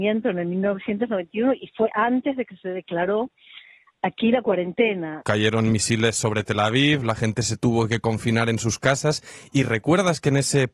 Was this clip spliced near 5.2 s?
yes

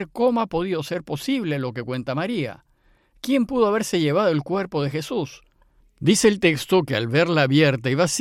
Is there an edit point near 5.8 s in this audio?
yes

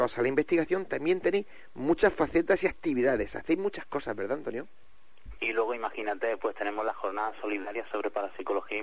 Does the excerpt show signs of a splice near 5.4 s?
yes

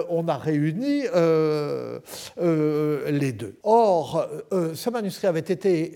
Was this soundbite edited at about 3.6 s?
yes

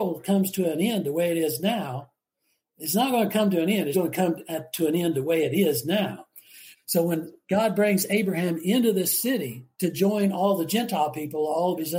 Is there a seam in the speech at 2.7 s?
no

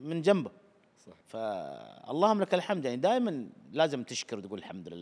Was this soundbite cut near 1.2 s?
yes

